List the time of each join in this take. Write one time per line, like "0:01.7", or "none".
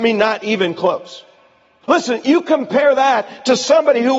0:01.8